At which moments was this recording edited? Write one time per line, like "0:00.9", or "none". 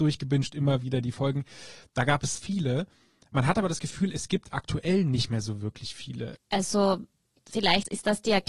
0:02.3
0:06.4

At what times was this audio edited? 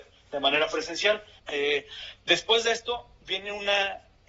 0:01.4

